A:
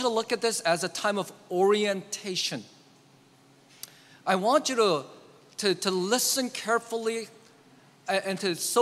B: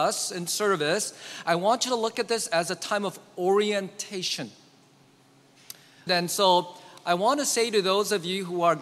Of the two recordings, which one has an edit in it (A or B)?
B